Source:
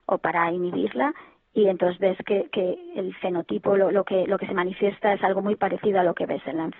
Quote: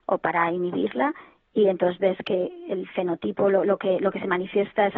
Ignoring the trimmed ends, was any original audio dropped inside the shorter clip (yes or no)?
yes